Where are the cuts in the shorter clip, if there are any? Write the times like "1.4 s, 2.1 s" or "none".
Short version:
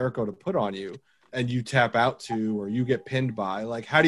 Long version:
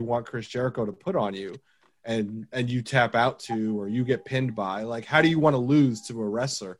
1.3 s